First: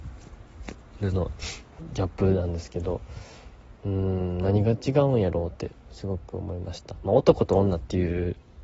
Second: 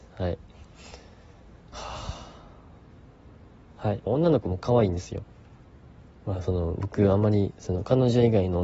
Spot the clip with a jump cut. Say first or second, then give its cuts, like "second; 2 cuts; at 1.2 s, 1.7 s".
second; 1 cut; at 4.1 s